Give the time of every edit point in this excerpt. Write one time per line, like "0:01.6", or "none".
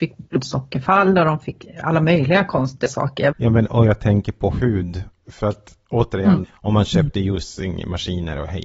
0:03.3
0:06.4